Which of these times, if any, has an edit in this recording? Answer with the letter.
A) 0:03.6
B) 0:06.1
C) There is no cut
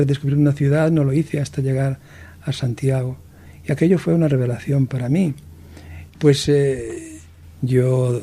B